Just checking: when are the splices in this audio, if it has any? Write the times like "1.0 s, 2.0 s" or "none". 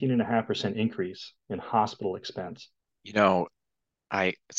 2.9 s

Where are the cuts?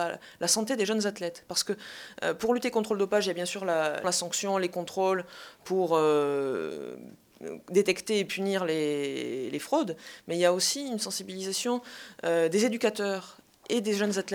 4.0 s

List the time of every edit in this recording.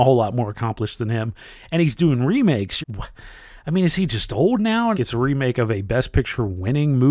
2.8 s, 4.9 s

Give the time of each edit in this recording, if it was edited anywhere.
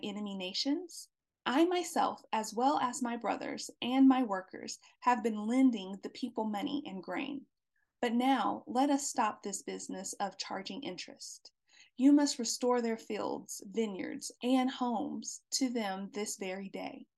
14.4 s

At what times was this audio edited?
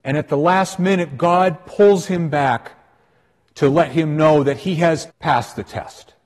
5.1 s

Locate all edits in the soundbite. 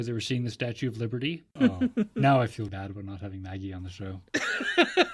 1.6 s, 2.7 s

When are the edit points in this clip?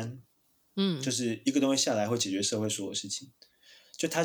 none

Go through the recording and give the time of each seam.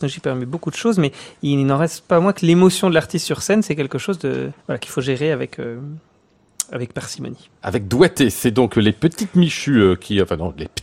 4.6 s

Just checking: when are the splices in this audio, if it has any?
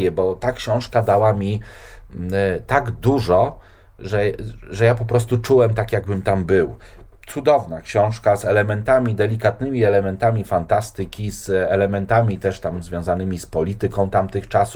none

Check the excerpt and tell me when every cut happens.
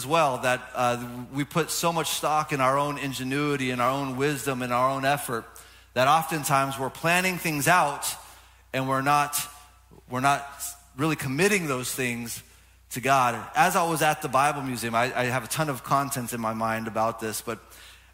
none

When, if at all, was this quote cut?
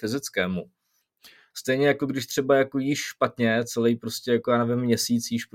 1.5 s

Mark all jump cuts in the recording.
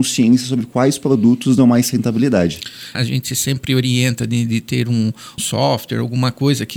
2.9 s, 5.4 s

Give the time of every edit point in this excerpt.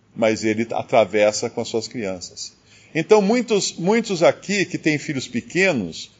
none

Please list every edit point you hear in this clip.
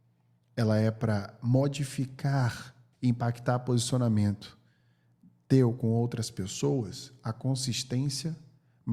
2.9 s

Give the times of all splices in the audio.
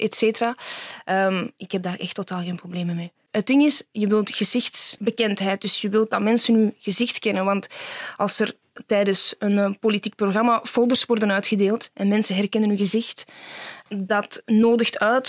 none

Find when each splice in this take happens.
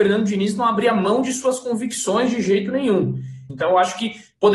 3.5 s

